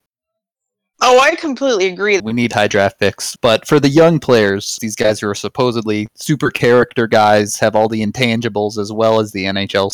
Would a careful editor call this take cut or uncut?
cut